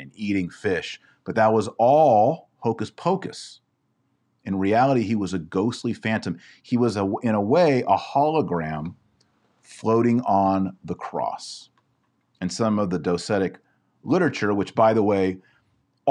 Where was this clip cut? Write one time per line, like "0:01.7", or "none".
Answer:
none